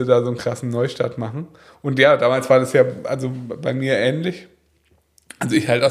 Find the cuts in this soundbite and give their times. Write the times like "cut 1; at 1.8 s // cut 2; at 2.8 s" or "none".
none